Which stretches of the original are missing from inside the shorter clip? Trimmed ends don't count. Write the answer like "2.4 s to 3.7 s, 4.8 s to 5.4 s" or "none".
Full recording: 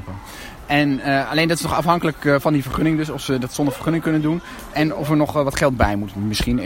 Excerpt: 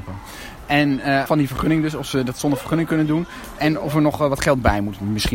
1.3 s to 2.4 s